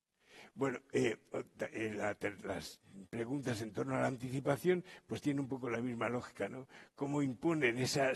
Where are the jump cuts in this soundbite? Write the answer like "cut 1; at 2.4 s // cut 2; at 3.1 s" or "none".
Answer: none

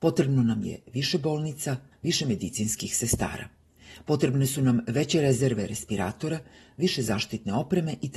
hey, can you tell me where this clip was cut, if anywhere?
cut 1; at 1.9 s

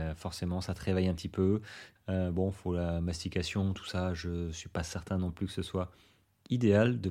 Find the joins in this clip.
cut 1; at 2.0 s

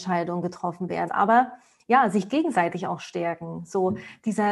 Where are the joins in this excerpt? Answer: cut 1; at 1.1 s

